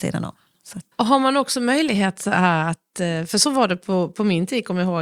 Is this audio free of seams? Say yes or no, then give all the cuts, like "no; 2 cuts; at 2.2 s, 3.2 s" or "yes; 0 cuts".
no; 1 cut; at 0.9 s